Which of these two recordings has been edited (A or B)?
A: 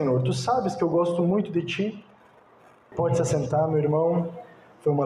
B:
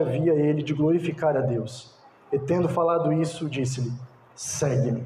A